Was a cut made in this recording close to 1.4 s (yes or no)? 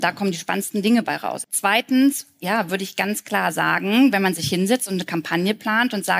yes